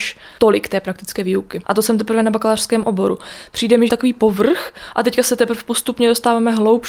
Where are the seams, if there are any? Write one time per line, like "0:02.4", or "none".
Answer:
0:01.6
0:03.9